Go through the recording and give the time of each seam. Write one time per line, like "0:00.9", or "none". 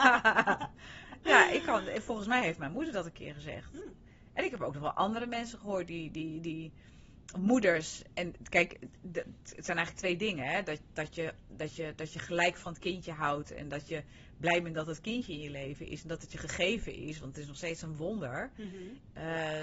none